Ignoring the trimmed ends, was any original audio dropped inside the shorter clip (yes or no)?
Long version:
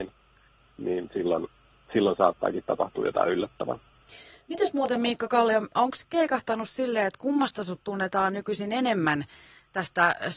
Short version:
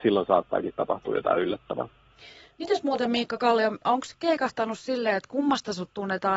no